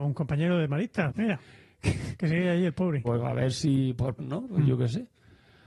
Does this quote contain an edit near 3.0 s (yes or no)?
yes